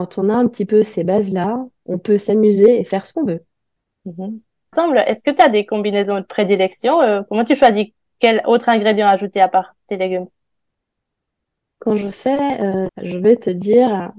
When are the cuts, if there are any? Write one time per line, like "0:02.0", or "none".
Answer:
0:04.7
0:12.9